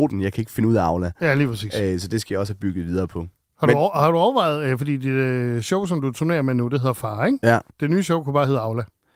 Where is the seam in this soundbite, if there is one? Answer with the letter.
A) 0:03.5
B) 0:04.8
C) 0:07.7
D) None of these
C